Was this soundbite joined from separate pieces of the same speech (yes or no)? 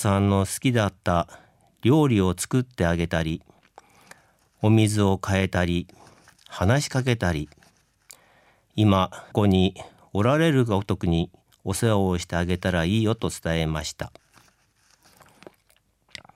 yes